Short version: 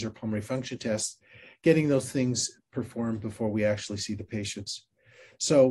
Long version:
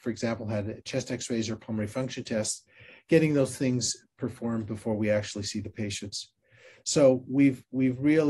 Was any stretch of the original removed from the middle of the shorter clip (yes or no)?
no